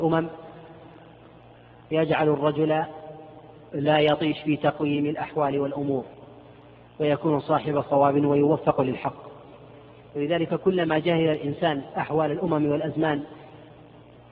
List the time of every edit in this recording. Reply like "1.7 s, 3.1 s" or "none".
none